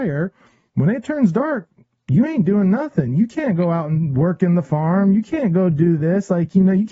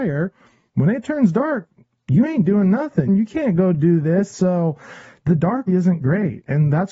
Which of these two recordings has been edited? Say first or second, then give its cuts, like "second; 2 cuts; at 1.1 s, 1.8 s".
second; 3 cuts; at 3.1 s, 4.3 s, 5.7 s